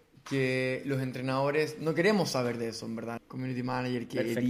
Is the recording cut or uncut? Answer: cut